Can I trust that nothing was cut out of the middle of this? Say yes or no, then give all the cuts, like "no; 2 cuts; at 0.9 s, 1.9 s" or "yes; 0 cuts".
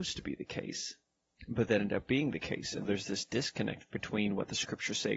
no; 1 cut; at 2.8 s